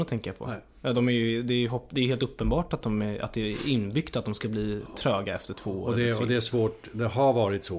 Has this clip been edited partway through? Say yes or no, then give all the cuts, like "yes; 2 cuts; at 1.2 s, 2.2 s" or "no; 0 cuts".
no; 0 cuts